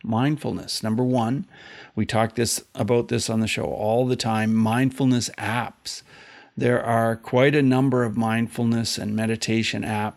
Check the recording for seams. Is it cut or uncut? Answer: uncut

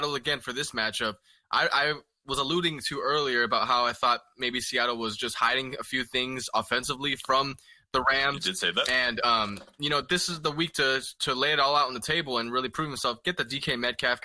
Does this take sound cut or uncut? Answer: uncut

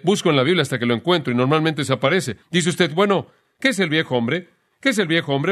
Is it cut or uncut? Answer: cut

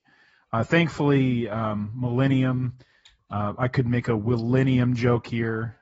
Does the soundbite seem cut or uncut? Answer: uncut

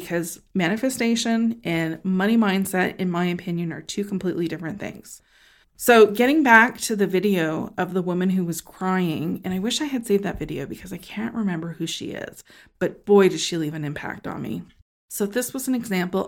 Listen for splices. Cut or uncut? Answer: cut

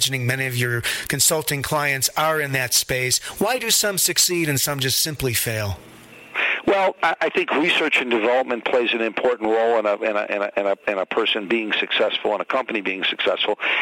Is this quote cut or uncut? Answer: uncut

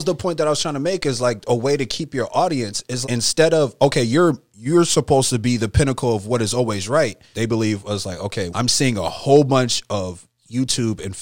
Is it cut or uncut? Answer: cut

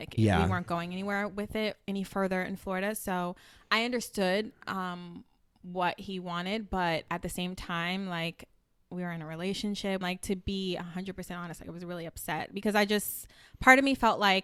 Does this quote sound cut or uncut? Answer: cut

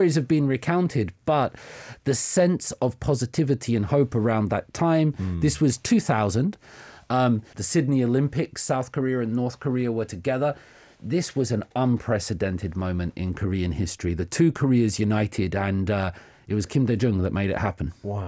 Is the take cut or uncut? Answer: cut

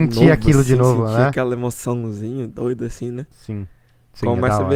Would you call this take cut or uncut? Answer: uncut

